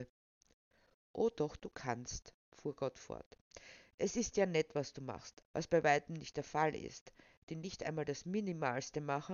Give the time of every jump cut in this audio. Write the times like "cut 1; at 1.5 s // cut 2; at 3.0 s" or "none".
cut 1; at 5.4 s // cut 2; at 7.4 s